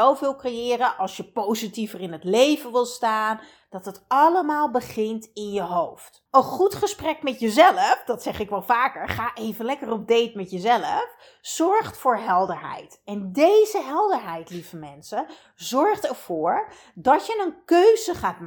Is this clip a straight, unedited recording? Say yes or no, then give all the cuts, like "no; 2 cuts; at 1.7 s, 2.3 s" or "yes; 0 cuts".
no; 2 cuts; at 3.6 s, 6.3 s